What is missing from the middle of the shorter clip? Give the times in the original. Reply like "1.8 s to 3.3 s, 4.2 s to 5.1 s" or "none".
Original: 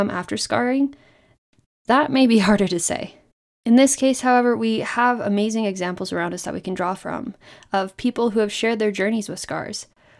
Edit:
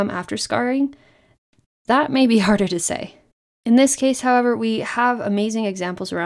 none